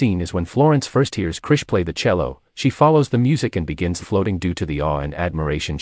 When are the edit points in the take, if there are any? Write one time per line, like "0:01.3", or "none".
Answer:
0:04.0